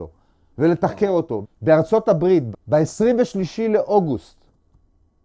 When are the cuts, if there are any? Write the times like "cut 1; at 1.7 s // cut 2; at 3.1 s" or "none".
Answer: cut 1; at 1.4 s // cut 2; at 2.5 s